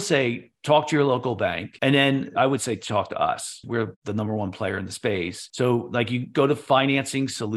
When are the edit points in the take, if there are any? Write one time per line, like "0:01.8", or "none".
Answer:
0:03.6